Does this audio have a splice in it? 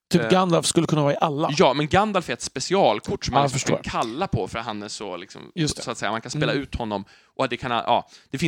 no; 0 cuts

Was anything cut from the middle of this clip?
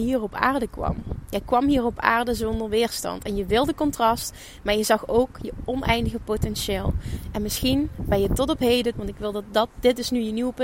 yes; 1 cut; at 8.9 s

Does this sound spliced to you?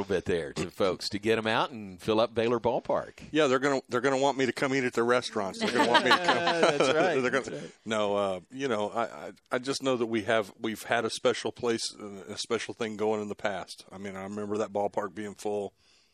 no; 0 cuts

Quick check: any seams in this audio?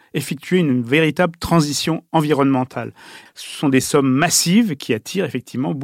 yes; 1 cut; at 3.3 s

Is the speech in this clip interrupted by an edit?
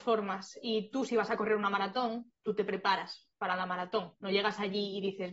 no; 0 cuts

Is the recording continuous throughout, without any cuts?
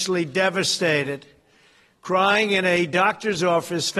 yes; 0 cuts

